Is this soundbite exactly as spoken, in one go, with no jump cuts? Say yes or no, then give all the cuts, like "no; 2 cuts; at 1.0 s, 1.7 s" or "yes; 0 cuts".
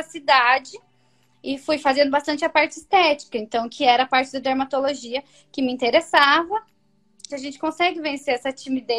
no; 1 cut; at 7.3 s